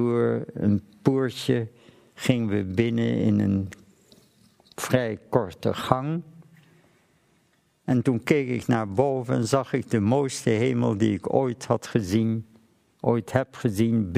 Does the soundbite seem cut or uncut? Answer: uncut